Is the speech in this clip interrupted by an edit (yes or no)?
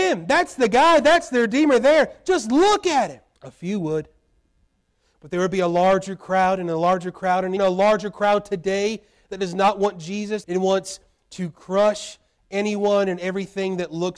yes